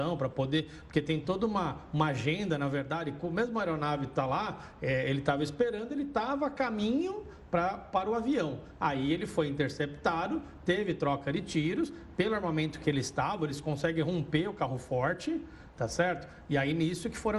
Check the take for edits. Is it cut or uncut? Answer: uncut